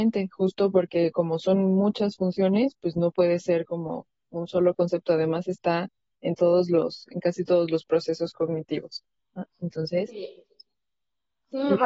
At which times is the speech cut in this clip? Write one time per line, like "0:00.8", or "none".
0:09.2